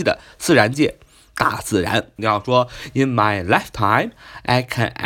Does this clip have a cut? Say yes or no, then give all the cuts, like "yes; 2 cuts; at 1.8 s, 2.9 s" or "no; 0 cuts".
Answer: yes; 1 cut; at 2.2 s